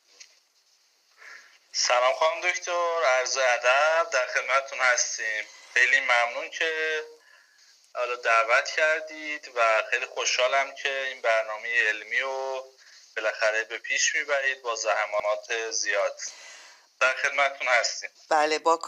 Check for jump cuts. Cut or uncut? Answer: uncut